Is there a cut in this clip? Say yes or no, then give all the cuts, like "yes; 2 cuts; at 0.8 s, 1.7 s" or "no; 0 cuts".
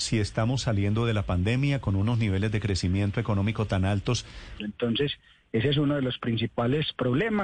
yes; 1 cut; at 4.6 s